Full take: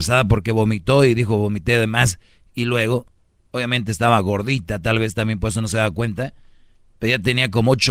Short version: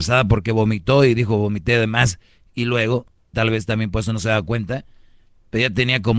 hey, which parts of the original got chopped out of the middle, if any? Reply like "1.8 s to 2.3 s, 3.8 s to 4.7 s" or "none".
3.3 s to 4.8 s